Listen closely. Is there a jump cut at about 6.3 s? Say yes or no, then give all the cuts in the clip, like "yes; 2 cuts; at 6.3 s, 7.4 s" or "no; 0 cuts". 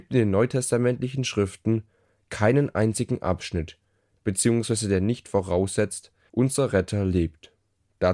yes; 2 cuts; at 4.2 s, 6.3 s